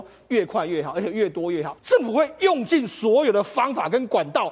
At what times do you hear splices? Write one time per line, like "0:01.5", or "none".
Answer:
0:01.8